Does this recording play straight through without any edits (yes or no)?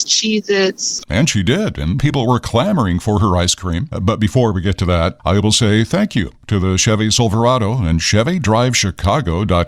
no